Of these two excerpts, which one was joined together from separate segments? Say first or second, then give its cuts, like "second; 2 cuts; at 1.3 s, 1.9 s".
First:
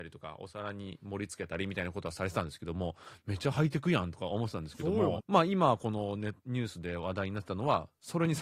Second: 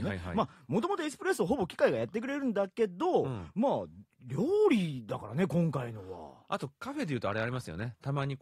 first; 1 cut; at 5.2 s